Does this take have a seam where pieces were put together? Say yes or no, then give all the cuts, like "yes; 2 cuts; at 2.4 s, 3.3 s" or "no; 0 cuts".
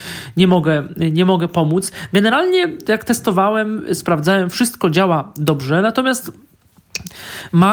no; 0 cuts